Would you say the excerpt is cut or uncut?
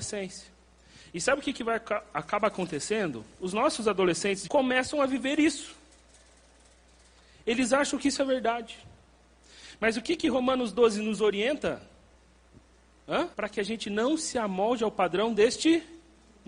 cut